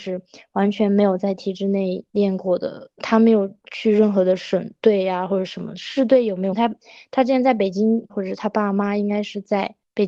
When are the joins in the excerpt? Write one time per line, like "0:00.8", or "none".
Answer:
0:06.5
0:08.1